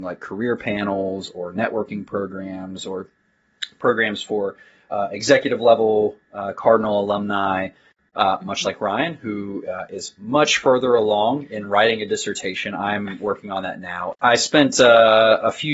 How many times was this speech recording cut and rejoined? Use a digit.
0